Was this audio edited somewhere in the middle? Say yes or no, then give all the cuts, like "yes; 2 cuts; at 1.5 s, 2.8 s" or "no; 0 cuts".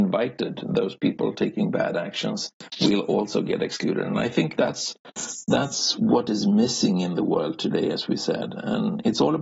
no; 0 cuts